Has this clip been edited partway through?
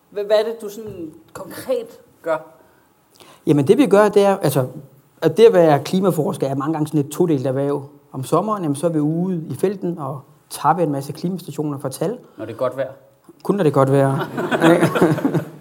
no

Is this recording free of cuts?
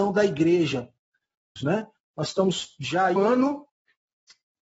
no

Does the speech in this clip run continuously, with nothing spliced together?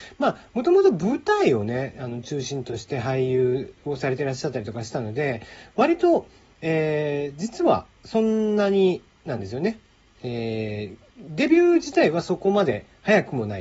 yes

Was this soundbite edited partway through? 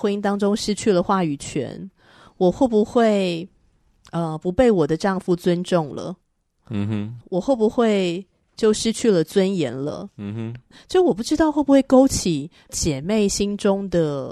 no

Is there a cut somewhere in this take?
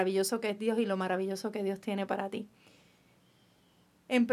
no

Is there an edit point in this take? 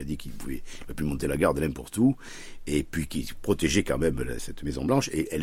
no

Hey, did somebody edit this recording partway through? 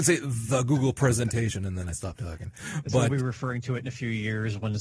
no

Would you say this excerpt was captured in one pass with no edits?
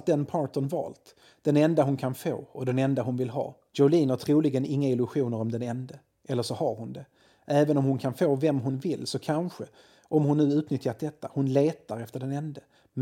yes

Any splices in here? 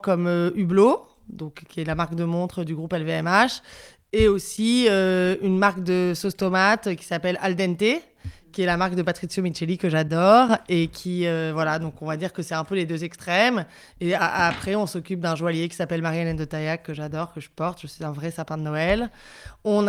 no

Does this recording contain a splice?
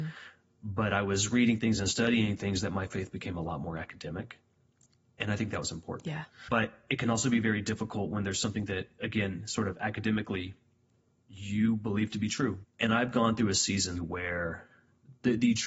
yes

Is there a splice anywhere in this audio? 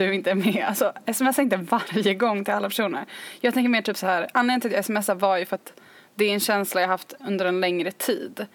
no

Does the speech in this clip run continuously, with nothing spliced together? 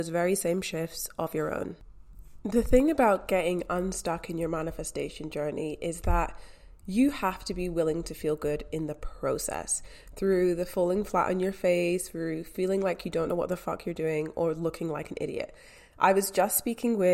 yes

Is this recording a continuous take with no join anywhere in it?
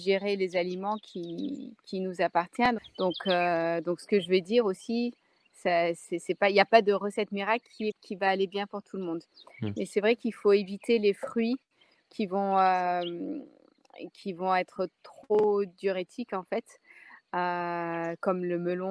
no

